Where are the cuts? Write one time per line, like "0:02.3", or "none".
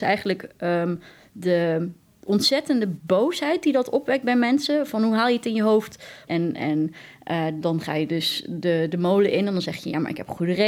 0:06.3

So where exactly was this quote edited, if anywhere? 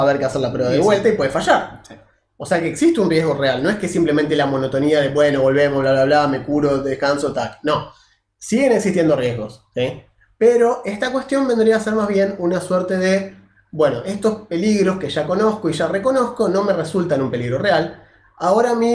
none

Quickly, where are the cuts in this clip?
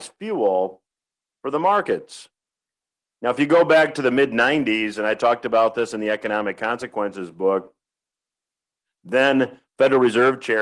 none

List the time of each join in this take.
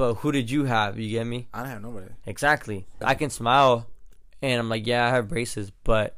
0:03.0

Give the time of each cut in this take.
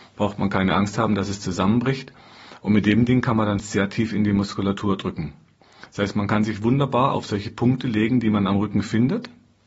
0:03.6

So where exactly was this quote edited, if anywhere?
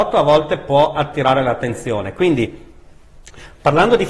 none

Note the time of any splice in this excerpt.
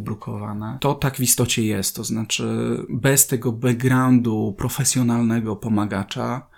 none

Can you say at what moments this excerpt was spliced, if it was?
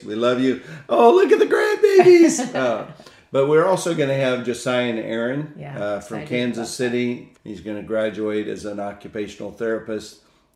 0:07.3

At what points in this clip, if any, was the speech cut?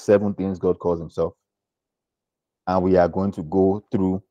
none

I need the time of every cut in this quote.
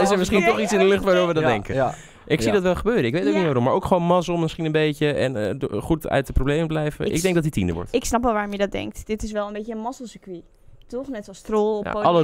none

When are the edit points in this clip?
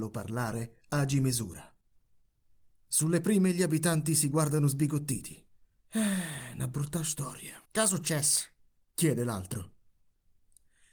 0:05.8
0:07.6

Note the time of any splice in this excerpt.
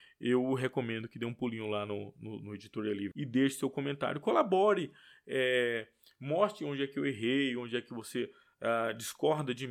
0:03.1

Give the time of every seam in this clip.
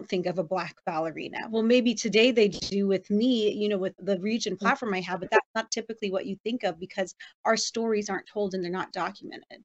0:04.0

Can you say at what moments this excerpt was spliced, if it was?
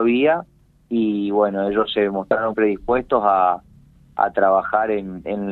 0:02.5

